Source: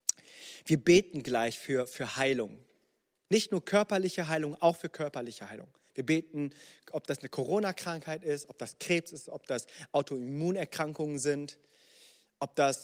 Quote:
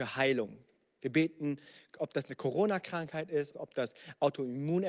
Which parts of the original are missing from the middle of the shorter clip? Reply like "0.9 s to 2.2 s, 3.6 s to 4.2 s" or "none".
3.0 s to 5.9 s, 8.5 s to 9.3 s